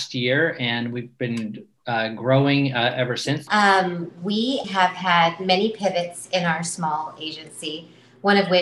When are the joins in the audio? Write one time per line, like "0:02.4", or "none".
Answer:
0:03.5
0:04.6